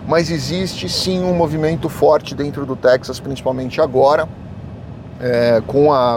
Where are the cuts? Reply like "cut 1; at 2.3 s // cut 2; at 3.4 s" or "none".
cut 1; at 1.8 s